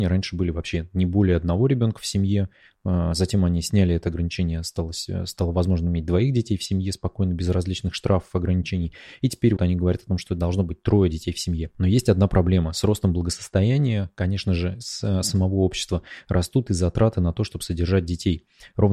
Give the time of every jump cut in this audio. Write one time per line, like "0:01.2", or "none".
0:09.6

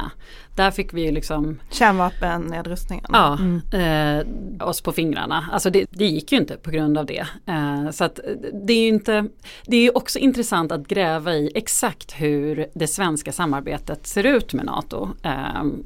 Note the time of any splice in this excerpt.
0:04.6
0:05.9

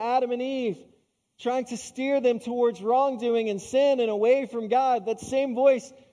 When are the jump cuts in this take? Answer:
none

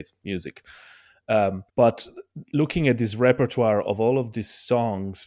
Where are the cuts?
0:01.7

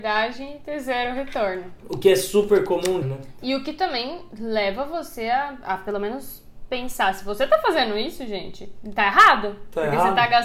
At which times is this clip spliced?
0:03.0

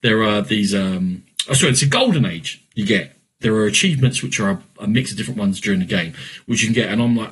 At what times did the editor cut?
0:03.4

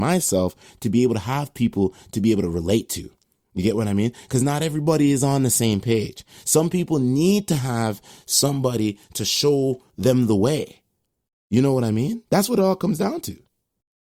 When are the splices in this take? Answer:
none

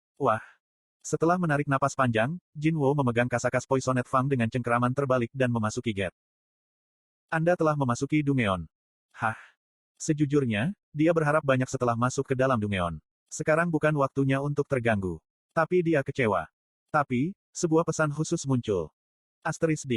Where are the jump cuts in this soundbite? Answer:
0:13.2
0:15.3

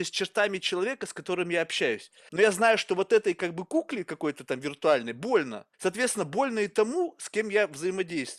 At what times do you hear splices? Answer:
0:02.3
0:05.7

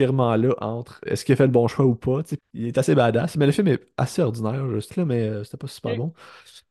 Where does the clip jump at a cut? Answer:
0:01.1
0:02.4
0:04.9

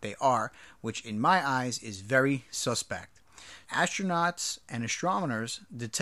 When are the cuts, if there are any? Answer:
0:03.6

